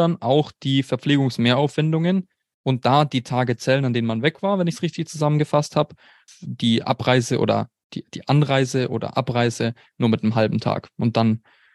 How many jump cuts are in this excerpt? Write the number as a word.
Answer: one